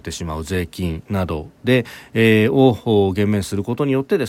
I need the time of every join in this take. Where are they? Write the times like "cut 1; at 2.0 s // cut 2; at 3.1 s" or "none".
none